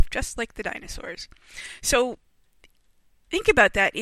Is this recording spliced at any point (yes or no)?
no